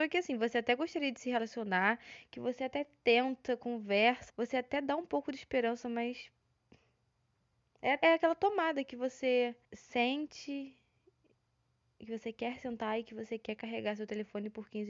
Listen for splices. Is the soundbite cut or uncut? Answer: cut